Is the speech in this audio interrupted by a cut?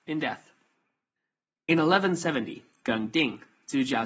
no; 0 cuts

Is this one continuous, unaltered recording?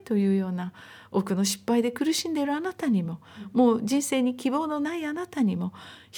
yes; 0 cuts

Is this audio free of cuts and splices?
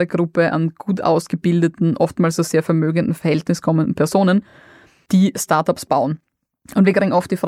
yes; 0 cuts

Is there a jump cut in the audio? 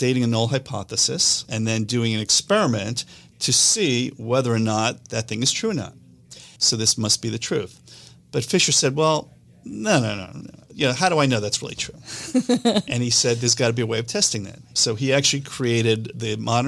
yes; 2 cuts; at 1.4 s, 6.6 s

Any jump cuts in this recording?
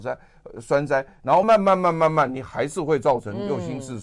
yes; 1 cut; at 1.4 s

